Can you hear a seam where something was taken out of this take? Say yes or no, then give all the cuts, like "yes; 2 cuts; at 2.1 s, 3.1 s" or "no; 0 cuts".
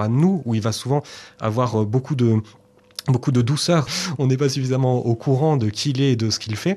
yes; 1 cut; at 3.9 s